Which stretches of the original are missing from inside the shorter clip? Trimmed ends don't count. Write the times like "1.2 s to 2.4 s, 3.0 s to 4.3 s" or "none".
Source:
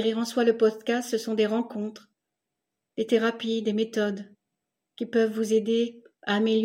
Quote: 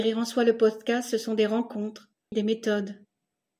2.3 s to 3.6 s